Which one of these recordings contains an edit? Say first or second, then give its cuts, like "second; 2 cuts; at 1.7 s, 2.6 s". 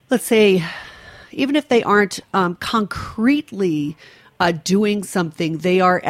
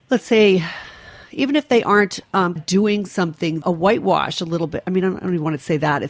second; 2 cuts; at 2.6 s, 3.6 s